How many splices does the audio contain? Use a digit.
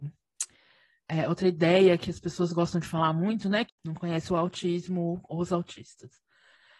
1